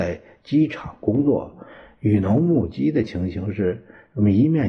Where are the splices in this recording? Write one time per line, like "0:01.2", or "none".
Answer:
none